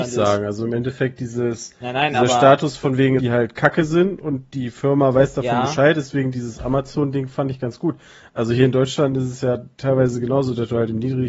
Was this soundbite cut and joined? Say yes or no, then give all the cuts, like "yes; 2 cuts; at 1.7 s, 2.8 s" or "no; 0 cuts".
yes; 1 cut; at 3.2 s